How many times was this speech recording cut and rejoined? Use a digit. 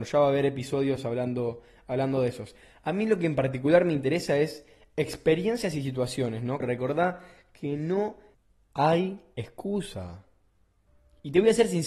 1